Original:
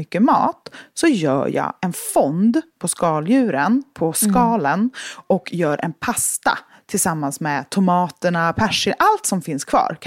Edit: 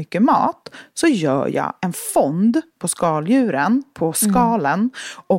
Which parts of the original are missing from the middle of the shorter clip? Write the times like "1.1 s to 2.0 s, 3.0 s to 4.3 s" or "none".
none